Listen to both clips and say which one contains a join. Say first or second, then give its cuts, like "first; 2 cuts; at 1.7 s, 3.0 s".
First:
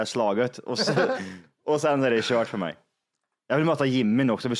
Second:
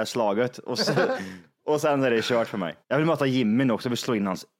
second; 1 cut; at 2.8 s